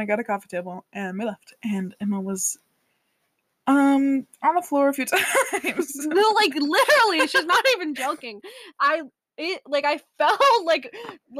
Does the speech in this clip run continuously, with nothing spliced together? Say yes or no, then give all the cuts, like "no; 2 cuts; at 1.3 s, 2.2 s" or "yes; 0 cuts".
yes; 0 cuts